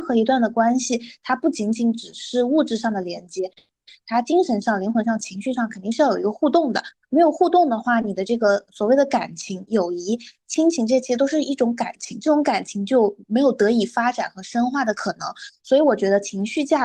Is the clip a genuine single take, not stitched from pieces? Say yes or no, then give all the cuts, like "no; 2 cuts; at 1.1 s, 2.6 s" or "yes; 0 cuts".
yes; 0 cuts